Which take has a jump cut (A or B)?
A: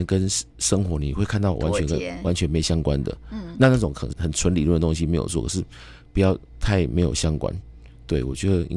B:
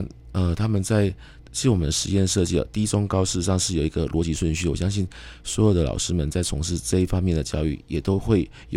A